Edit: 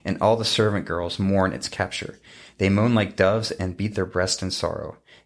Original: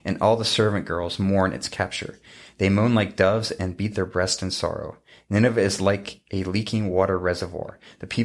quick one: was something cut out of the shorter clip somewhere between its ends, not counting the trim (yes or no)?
no